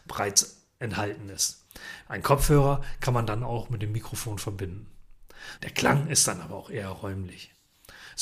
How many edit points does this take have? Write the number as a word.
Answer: two